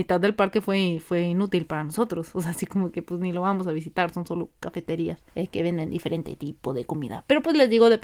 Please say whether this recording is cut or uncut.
cut